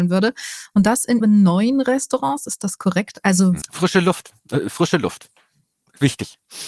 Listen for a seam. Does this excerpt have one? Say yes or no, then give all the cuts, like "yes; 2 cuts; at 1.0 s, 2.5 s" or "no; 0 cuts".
yes; 2 cuts; at 1.2 s, 3.6 s